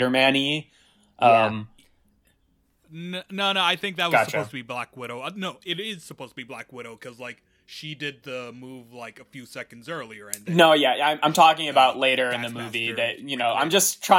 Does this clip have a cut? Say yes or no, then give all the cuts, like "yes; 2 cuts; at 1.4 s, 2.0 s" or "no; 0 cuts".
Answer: no; 0 cuts